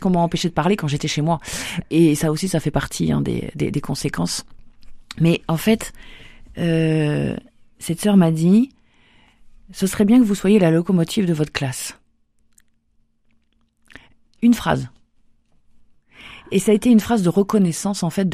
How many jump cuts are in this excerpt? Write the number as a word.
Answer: one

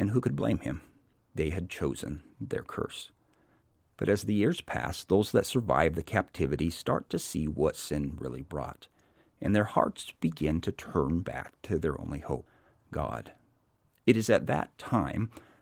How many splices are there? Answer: zero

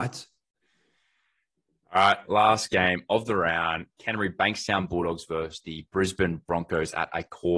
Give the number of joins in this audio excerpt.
zero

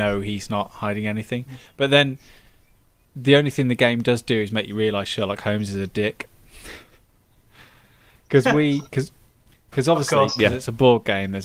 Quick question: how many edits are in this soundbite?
zero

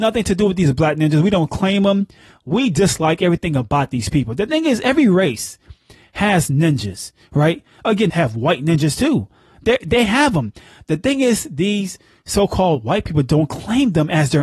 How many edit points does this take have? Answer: one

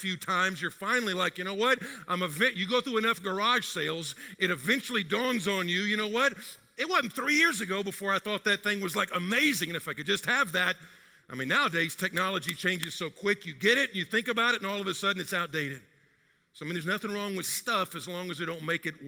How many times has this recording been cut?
zero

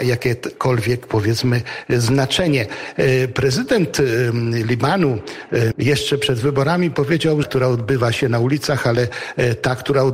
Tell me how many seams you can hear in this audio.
two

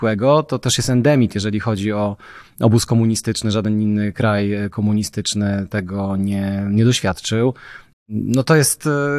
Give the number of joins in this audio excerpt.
one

